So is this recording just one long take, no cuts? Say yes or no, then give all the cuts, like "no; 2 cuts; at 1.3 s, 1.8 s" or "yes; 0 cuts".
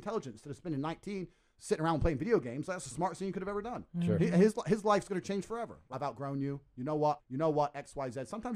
no; 2 cuts; at 5.9 s, 7.2 s